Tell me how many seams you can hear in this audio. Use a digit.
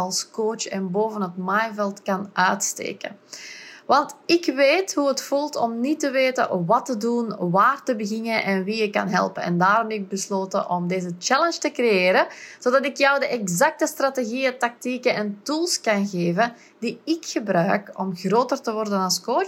0